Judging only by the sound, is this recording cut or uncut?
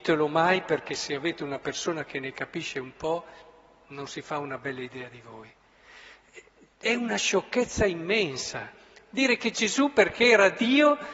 uncut